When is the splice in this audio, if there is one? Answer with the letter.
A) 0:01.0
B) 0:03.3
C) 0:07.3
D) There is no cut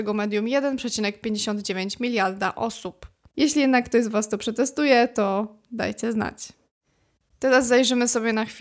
B